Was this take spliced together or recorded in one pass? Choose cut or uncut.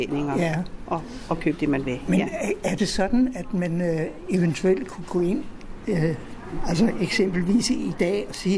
uncut